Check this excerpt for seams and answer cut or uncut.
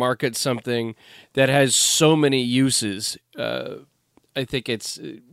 uncut